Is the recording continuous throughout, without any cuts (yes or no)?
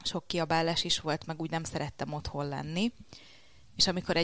yes